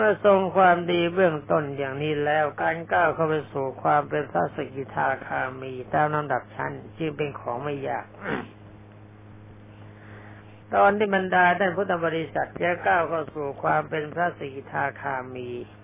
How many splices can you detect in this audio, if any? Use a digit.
1